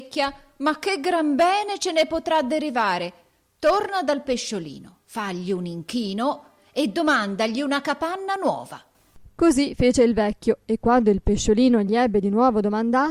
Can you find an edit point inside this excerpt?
no; 0 cuts

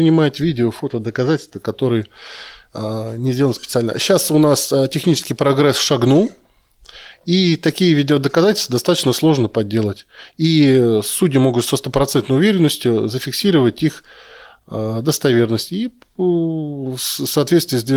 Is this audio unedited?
yes; 0 cuts

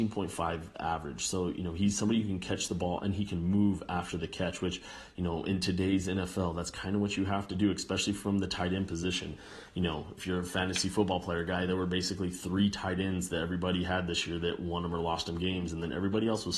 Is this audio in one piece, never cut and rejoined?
yes; 0 cuts

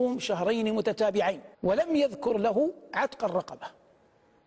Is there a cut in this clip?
yes; 1 cut; at 1.5 s

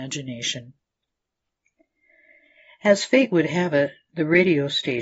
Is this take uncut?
yes; 0 cuts

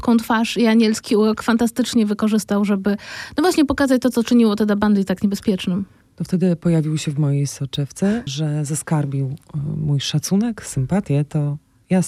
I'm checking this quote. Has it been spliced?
yes; 1 cut; at 8.3 s

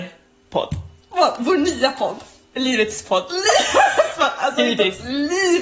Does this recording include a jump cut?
no; 0 cuts

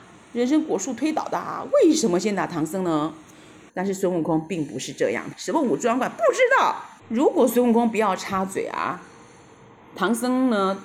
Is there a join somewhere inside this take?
yes; 3 cuts; at 3.7 s, 5.3 s, 7.0 s

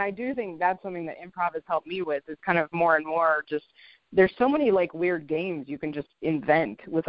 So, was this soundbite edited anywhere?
no; 0 cuts

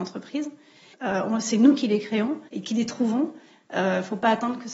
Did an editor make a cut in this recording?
yes; 2 cuts; at 0.9 s, 2.5 s

